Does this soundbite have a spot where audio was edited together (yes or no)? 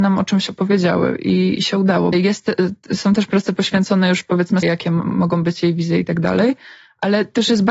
yes